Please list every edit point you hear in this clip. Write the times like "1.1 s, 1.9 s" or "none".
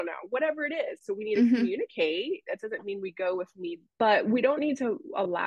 3.9 s